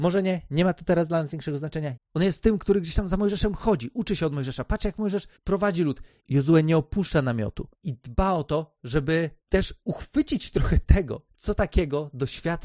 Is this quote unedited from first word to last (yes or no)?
no